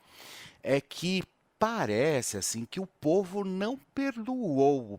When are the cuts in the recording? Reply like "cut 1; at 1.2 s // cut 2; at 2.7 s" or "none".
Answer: none